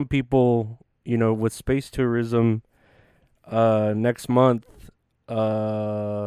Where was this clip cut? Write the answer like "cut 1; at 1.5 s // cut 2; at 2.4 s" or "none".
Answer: none